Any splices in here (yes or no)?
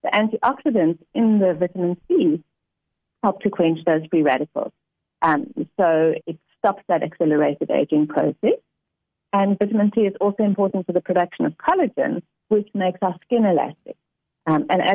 yes